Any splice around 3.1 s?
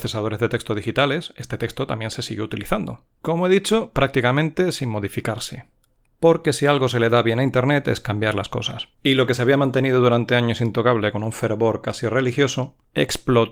no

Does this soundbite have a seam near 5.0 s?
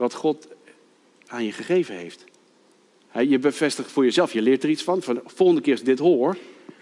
no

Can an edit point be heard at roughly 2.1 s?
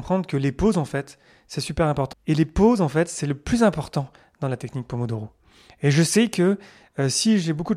yes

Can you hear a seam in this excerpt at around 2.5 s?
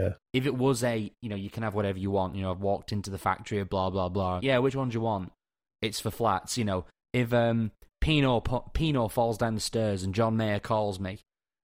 no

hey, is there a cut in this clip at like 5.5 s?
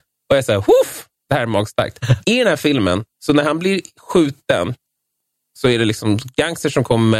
no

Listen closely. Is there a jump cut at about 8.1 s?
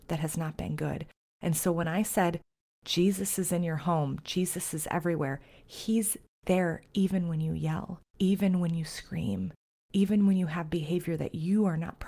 yes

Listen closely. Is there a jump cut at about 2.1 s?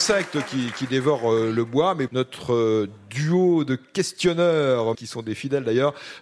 yes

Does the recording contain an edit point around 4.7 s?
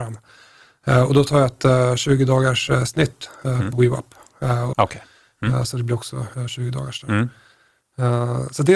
yes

